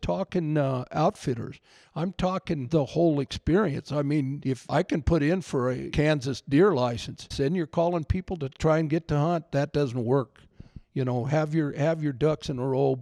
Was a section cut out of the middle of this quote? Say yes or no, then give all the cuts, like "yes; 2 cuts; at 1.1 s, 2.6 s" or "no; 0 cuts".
yes; 1 cut; at 7.3 s